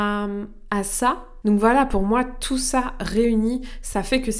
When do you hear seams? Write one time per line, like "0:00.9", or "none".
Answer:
0:01.4